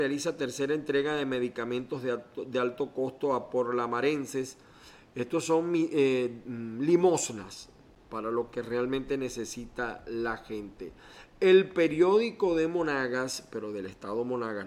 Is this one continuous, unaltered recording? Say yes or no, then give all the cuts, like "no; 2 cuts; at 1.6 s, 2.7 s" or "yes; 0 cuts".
yes; 0 cuts